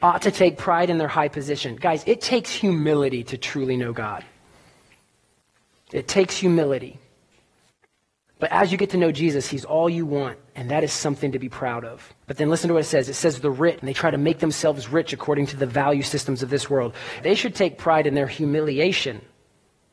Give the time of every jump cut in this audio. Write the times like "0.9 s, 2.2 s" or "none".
12.2 s, 13.8 s, 17.2 s